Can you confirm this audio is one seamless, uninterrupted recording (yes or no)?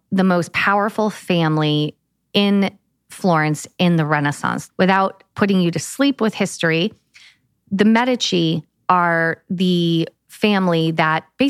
no